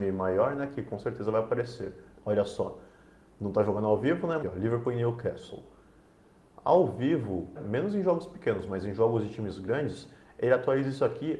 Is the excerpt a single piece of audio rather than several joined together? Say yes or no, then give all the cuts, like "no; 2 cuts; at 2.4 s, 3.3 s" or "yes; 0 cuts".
no; 3 cuts; at 2.1 s, 4.4 s, 7.6 s